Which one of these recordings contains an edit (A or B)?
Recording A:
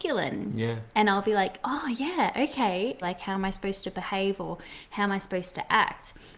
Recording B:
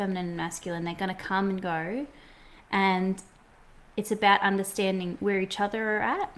A